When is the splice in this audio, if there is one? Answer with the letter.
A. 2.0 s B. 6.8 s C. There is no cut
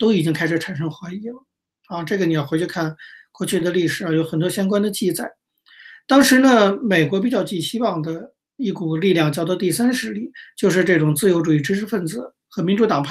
C